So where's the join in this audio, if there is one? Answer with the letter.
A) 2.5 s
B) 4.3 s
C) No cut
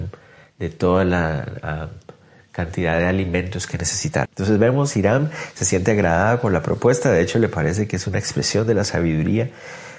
B